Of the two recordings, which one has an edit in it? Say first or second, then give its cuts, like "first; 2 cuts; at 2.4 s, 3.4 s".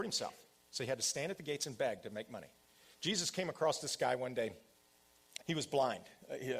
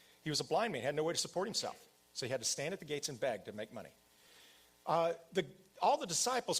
first; 2 cuts; at 2.9 s, 5.4 s